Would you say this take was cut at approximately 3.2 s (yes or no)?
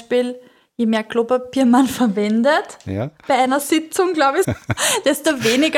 no